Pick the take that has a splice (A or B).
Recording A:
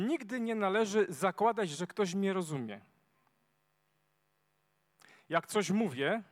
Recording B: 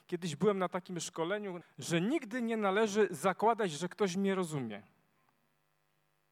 B